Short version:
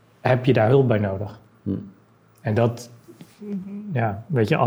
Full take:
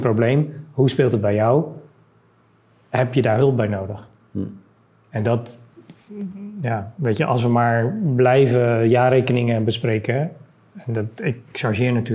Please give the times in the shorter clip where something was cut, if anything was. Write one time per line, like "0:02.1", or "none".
none